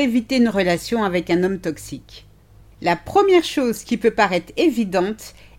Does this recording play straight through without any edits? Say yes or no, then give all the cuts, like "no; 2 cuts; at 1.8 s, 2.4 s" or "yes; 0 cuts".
yes; 0 cuts